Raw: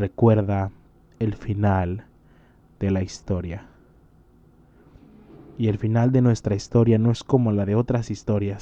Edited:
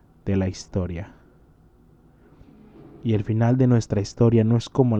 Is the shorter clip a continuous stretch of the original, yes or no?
yes